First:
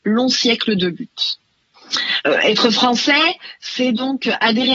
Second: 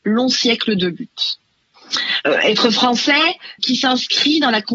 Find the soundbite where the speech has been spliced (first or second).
second